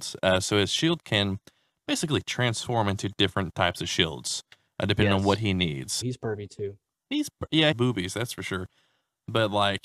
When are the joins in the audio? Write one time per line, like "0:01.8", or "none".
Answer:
0:06.0
0:07.7